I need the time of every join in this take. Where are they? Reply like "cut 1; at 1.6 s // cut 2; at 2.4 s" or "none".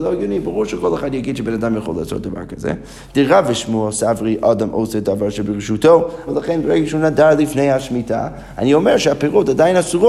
cut 1; at 3.1 s // cut 2; at 6.3 s